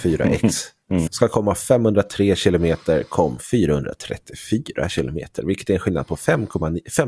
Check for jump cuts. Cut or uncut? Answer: cut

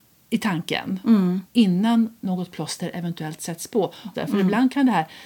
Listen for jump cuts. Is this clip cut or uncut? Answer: cut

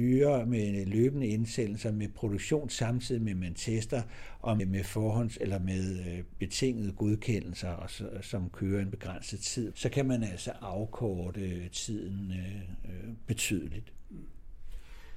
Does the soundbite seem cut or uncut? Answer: cut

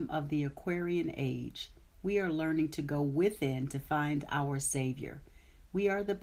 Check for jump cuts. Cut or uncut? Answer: uncut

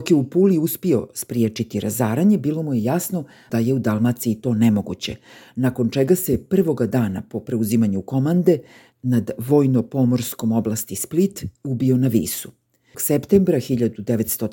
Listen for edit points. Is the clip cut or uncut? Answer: cut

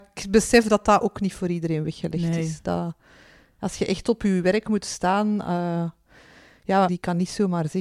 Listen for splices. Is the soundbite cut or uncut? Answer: cut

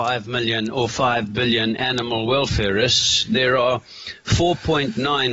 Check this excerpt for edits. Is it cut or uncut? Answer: uncut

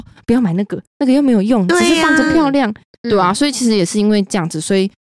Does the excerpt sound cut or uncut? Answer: uncut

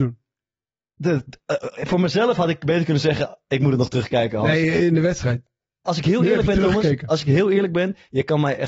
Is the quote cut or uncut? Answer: cut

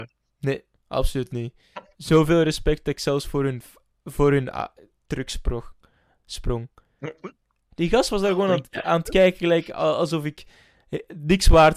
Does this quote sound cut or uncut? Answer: cut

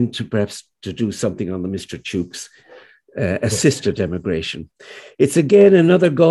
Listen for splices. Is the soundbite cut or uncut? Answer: uncut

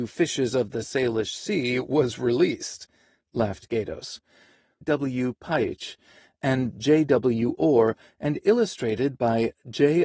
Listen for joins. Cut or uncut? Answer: cut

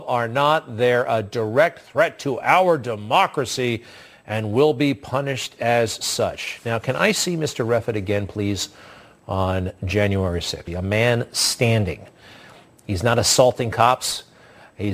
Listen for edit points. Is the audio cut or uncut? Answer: cut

